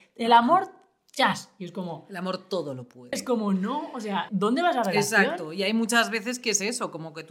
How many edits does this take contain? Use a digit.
2